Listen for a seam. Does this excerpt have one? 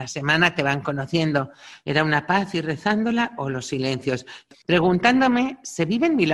yes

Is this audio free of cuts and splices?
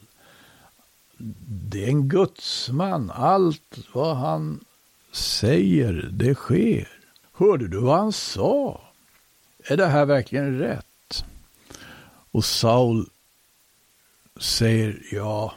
no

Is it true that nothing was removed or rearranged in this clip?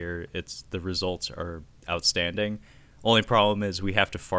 yes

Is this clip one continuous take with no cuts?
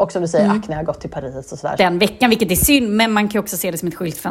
no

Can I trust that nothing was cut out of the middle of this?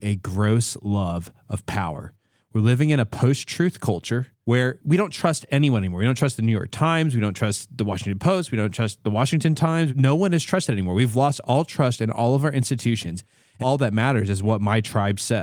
no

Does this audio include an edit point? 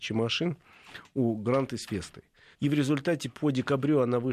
yes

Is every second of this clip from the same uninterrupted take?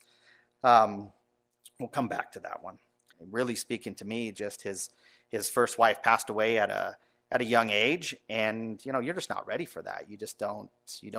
no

